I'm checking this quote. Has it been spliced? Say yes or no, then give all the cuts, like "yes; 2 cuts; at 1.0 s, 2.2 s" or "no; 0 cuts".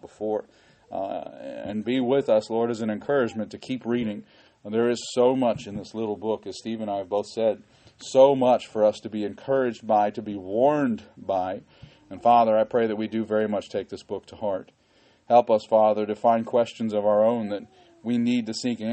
no; 0 cuts